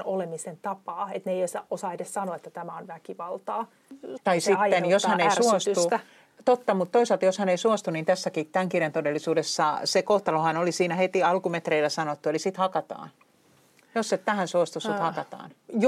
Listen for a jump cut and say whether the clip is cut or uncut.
cut